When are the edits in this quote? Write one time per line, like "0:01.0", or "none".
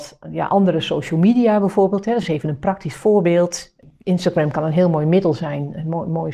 none